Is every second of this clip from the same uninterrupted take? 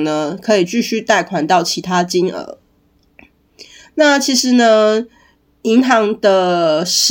yes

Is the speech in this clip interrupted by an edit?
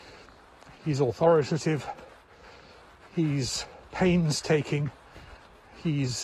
no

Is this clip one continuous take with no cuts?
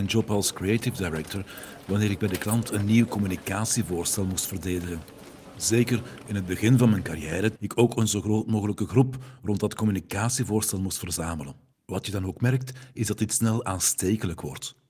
no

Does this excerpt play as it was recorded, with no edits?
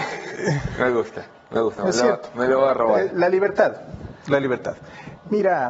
yes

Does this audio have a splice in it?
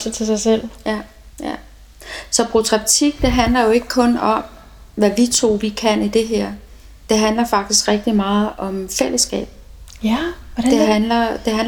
yes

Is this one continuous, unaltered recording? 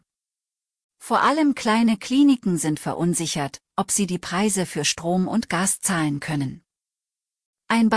no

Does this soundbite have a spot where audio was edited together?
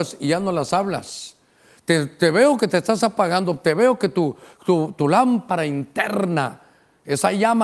no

